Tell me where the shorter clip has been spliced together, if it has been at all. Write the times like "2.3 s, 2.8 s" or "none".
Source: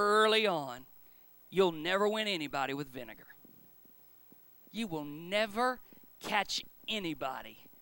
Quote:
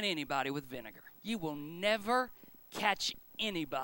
1.2 s